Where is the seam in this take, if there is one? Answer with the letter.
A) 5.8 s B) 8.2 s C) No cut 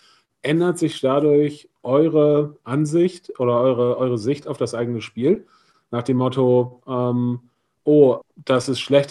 B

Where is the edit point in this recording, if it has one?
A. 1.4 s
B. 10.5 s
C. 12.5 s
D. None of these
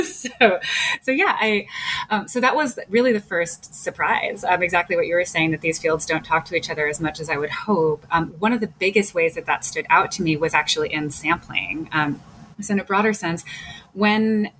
C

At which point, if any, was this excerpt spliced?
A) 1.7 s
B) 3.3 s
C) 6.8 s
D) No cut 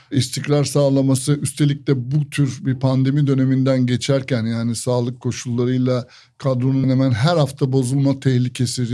C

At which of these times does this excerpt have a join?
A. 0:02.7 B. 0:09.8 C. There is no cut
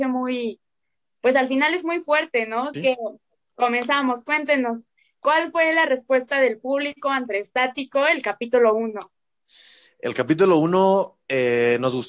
A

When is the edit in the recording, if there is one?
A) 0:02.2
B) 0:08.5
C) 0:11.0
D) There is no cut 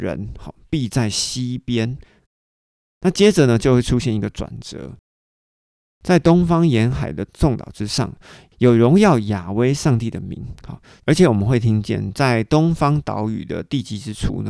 A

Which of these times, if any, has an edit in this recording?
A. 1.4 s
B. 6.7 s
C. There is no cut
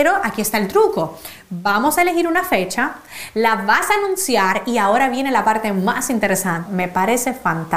B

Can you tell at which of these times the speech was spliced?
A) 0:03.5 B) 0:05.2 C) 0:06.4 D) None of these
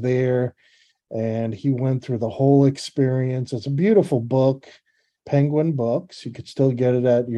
B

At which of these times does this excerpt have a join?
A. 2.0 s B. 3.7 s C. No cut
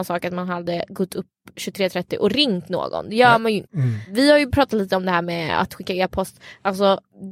B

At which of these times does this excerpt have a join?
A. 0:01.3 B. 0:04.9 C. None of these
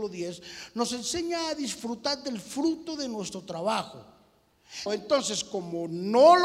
B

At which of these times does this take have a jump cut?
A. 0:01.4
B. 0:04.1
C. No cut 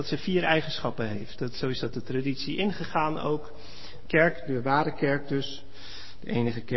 B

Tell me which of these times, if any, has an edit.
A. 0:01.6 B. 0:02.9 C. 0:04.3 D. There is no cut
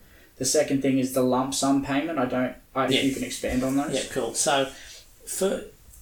B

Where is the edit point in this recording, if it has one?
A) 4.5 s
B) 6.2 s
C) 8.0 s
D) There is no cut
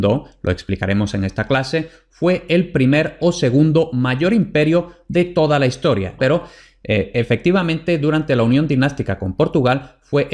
B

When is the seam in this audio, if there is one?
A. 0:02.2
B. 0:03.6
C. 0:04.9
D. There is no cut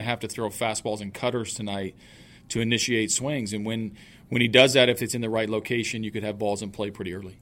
D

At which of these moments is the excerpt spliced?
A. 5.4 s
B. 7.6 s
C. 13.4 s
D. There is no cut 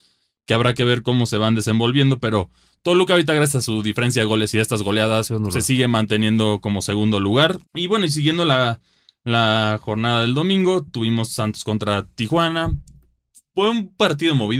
B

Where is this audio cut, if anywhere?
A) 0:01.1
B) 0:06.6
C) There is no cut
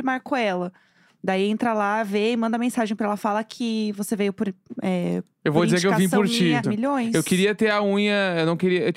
B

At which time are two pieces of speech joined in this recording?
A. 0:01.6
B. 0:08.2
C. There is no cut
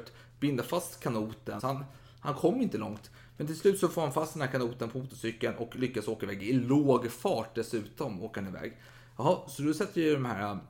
A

